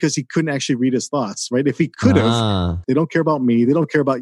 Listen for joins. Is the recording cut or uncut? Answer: cut